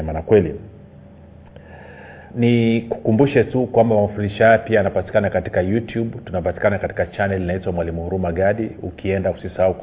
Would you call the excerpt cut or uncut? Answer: cut